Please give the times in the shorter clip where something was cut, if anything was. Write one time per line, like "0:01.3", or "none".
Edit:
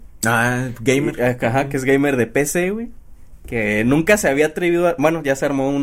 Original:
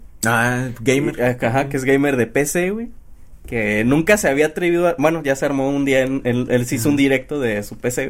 none